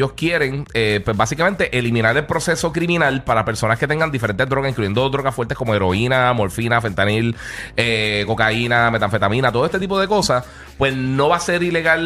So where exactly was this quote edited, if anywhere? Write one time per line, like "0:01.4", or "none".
none